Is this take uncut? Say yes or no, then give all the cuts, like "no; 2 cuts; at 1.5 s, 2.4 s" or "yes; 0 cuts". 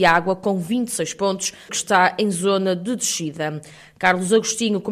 no; 1 cut; at 1.7 s